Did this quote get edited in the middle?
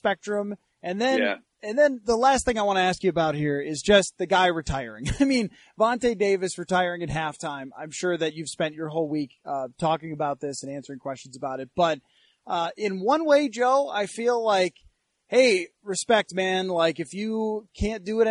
no; 0 cuts

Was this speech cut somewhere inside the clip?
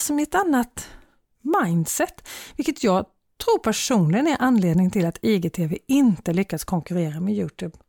no; 0 cuts

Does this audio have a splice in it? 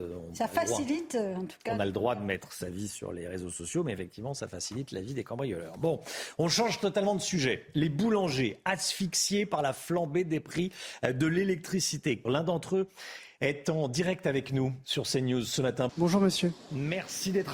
yes; 2 cuts; at 12.3 s, 15.9 s

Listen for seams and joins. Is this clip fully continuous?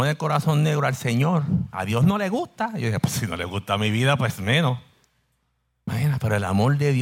yes; 0 cuts

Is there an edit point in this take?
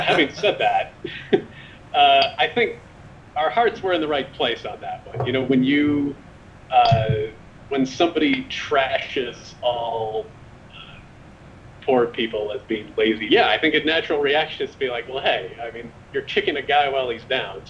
yes; 2 cuts; at 13.3 s, 15.9 s

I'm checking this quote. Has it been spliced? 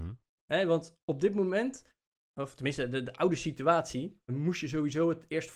yes; 1 cut; at 4.3 s

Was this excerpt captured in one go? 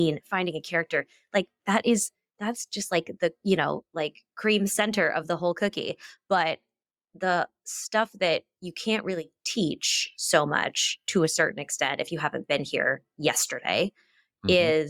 yes; 0 cuts

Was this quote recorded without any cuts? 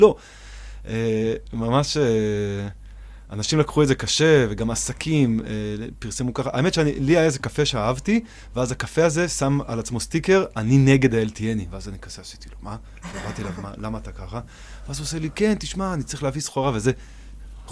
yes; 0 cuts

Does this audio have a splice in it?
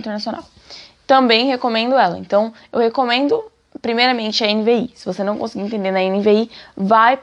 no; 0 cuts

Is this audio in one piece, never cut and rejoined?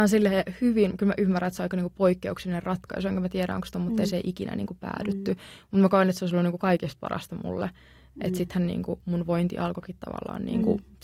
yes; 0 cuts

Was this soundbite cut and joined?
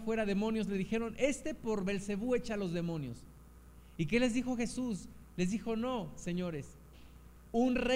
no; 0 cuts

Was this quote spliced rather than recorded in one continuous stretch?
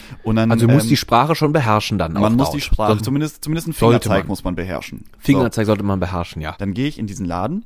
yes; 2 cuts; at 3.0 s, 6.6 s

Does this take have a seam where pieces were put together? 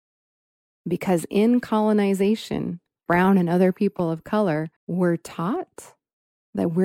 yes; 2 cuts; at 3.1 s, 4.8 s

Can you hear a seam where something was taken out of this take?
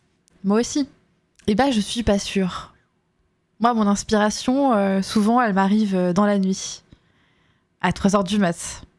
no; 0 cuts

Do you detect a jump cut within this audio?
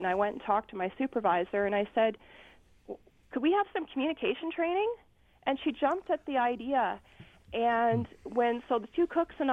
no; 0 cuts

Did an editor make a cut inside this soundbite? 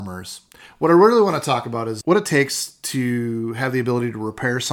yes; 1 cut; at 2.0 s

